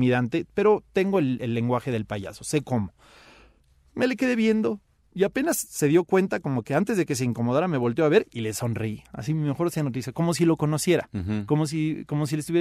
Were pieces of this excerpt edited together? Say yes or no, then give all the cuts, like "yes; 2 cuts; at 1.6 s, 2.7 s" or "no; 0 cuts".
no; 0 cuts